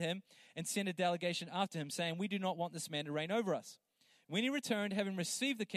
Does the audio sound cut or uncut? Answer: uncut